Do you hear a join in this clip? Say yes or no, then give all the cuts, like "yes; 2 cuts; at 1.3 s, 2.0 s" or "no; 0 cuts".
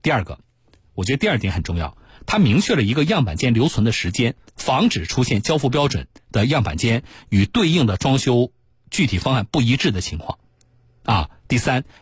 yes; 1 cut; at 4.5 s